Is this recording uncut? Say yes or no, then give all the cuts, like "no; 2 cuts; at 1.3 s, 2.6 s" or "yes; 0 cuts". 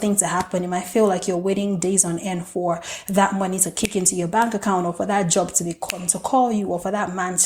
yes; 0 cuts